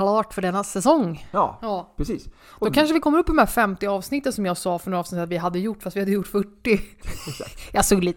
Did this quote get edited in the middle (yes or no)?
yes